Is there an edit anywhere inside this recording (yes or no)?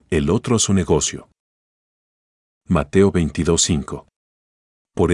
no